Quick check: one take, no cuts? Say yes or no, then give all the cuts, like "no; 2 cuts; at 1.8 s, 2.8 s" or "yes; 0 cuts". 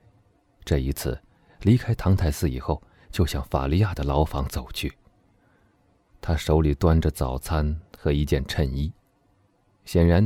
no; 1 cut; at 1.6 s